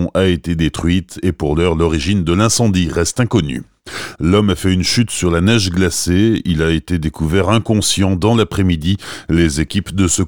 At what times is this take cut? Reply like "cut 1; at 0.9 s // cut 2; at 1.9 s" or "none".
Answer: cut 1; at 4.2 s